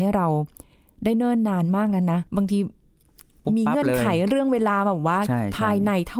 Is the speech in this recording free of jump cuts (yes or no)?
no